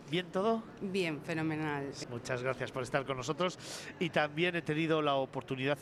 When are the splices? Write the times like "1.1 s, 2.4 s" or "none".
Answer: 2.0 s